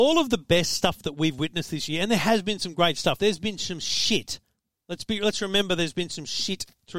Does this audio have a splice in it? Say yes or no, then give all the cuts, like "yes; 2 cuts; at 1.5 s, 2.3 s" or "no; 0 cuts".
no; 0 cuts